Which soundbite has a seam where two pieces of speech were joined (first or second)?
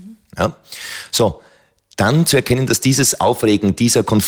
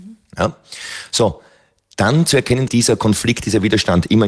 second